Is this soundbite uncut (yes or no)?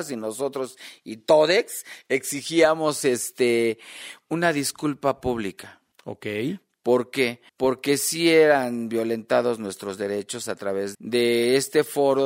no